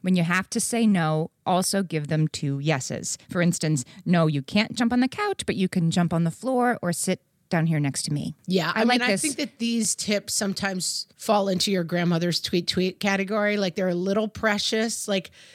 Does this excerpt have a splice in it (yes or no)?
no